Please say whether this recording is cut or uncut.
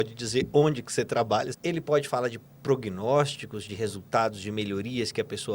cut